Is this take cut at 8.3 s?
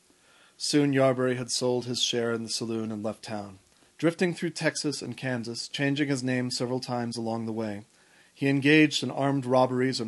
no; 1 cut; at 3.9 s

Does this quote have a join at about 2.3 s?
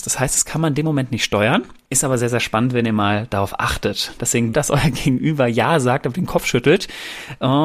no; 1 cut; at 4.5 s

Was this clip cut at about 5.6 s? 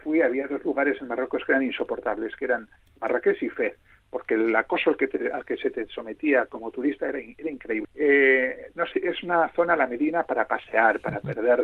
no; 2 cuts; at 7.8 s, 8.9 s

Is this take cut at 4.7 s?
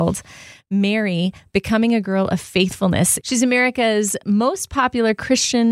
no; 1 cut; at 3.2 s

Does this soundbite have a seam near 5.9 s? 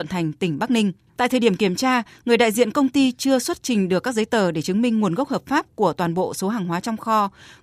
no; 1 cut; at 1.1 s

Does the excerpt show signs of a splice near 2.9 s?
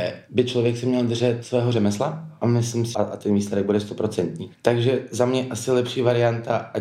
yes; 1 cut; at 2.9 s

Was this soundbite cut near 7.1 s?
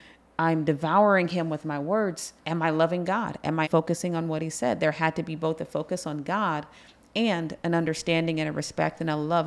no; 2 cuts; at 2.4 s, 3.6 s

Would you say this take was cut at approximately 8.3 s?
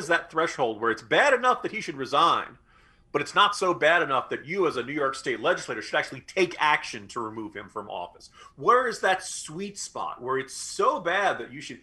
no; 0 cuts

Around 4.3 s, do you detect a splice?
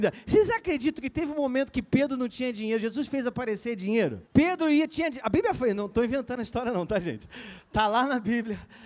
yes; 1 cut; at 4.3 s

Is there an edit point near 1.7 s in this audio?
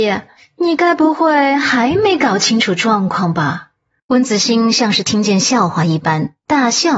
no; 1 cut; at 4.0 s

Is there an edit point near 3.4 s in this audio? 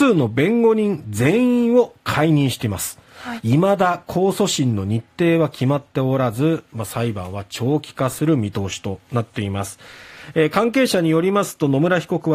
yes; 1 cut; at 3.4 s

